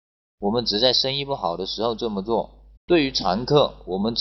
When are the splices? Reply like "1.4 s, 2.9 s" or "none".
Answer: 2.8 s